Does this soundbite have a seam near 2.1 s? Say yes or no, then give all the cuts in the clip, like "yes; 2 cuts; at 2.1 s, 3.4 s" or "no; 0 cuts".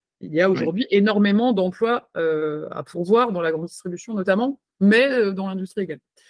no; 0 cuts